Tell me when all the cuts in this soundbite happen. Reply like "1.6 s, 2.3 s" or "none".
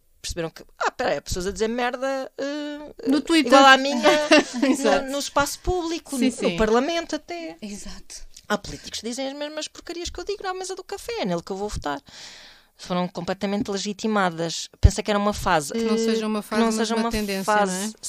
3.0 s, 15.7 s